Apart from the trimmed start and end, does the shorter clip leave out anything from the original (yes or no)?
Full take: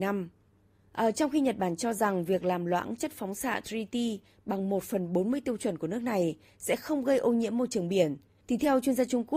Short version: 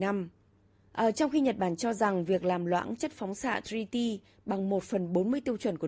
no